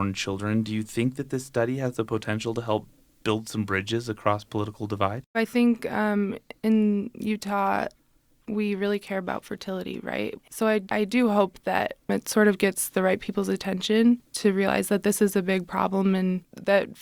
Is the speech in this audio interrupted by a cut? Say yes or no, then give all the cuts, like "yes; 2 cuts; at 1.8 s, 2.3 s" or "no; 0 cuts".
yes; 1 cut; at 5.3 s